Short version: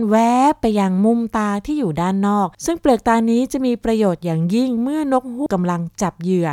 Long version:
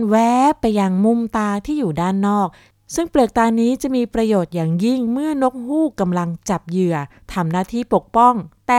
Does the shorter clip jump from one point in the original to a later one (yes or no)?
yes